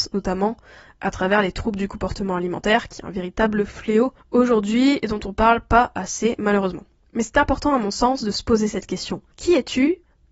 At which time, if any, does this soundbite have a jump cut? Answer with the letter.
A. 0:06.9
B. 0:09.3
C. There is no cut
C